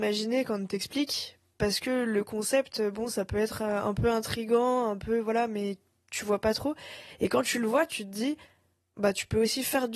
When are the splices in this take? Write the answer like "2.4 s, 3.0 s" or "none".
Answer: none